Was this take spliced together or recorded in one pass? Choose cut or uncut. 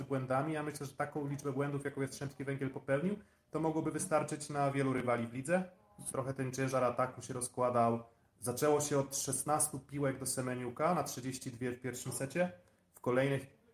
cut